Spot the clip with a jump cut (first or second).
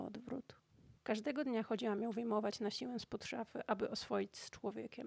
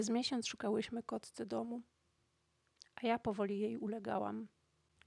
first